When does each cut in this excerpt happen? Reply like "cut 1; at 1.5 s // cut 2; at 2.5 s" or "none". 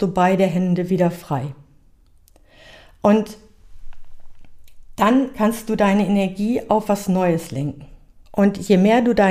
cut 1; at 8.2 s

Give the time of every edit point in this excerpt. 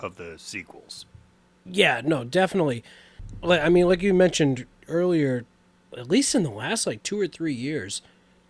cut 1; at 5.9 s

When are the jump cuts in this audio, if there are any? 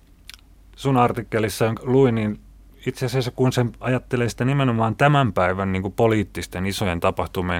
cut 1; at 1.8 s

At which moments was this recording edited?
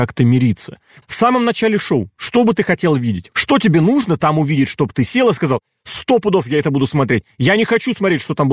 cut 1; at 1.0 s // cut 2; at 3.3 s

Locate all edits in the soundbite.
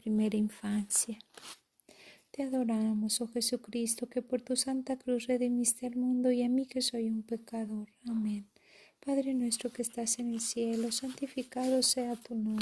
none

